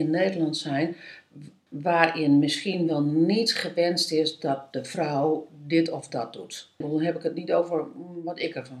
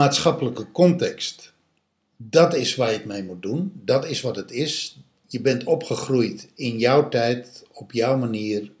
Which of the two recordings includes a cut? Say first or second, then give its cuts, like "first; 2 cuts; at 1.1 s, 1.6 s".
first; 2 cuts; at 1.7 s, 6.8 s